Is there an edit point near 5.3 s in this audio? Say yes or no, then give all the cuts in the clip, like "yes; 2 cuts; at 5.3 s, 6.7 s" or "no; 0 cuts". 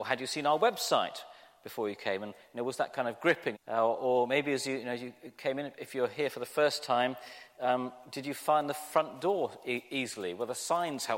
no; 1 cut; at 3.5 s